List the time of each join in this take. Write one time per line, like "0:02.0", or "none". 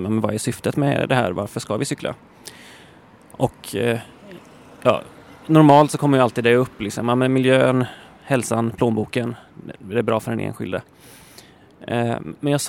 none